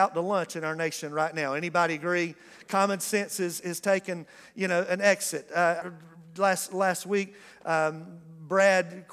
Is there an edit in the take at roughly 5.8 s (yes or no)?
yes